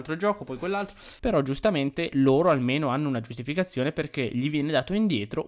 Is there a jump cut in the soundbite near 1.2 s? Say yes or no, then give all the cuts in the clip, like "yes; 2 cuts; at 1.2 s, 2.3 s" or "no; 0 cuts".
yes; 1 cut; at 1.2 s